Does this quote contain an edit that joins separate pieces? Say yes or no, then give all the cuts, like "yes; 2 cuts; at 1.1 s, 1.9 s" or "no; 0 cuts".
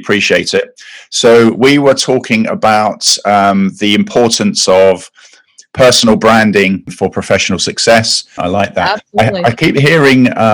yes; 1 cut; at 8.4 s